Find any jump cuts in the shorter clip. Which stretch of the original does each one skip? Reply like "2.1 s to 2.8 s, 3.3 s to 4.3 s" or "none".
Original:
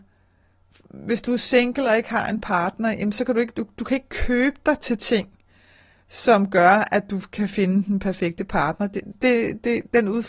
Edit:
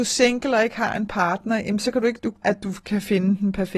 3.8 s to 6.9 s

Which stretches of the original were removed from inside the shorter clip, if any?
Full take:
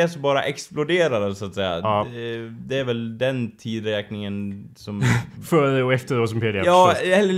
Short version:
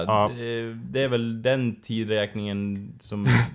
none

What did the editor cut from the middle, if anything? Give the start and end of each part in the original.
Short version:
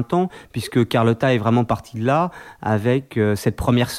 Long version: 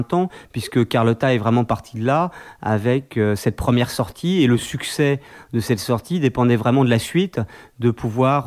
none

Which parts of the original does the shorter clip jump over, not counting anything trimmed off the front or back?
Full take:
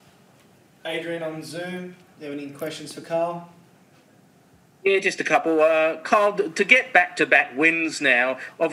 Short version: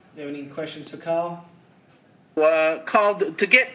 4.4 s to 5.5 s

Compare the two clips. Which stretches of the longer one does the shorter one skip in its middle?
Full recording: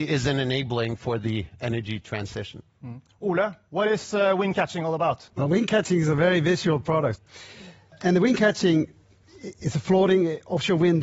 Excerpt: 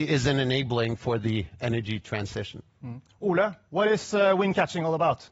none

